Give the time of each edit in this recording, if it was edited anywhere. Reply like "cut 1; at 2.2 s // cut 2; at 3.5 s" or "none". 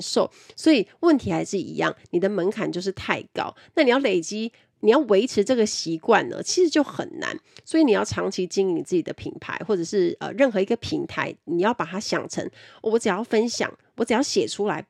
none